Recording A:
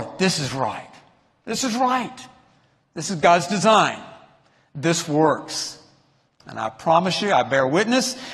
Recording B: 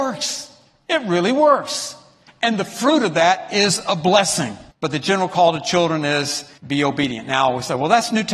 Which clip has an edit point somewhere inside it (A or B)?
B